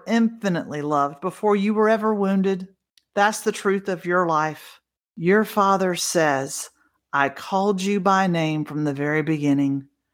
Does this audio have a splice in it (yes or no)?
yes